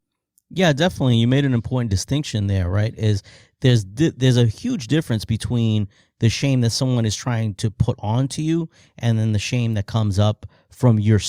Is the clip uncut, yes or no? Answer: yes